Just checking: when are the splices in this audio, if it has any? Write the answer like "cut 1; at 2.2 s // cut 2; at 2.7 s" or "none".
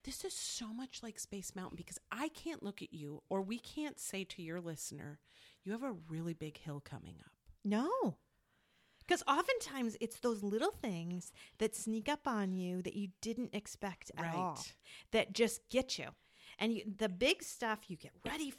none